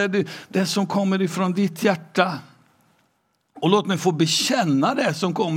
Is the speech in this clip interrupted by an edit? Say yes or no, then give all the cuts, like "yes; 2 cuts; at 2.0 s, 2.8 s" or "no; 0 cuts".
no; 0 cuts